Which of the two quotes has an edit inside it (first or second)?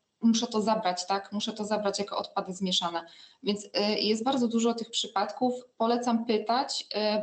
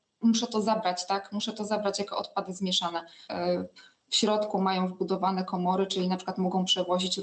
second